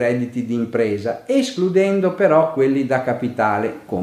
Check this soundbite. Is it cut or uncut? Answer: uncut